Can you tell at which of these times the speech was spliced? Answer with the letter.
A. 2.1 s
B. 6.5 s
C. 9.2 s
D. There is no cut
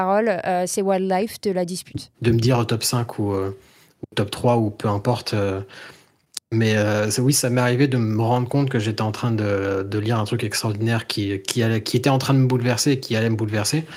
A